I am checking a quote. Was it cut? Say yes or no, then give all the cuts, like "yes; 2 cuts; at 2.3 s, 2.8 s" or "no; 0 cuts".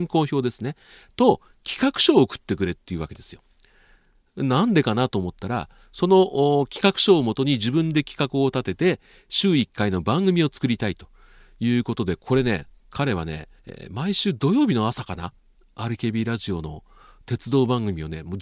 yes; 1 cut; at 13.6 s